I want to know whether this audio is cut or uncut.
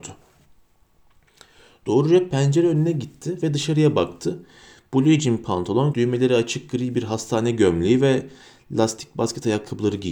cut